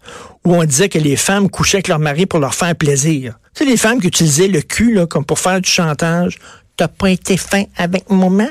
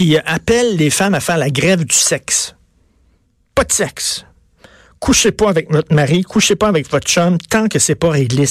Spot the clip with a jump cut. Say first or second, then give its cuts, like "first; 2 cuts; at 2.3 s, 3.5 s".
first; 1 cut; at 3.5 s